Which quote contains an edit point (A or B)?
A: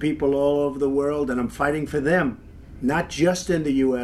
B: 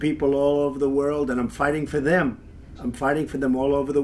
B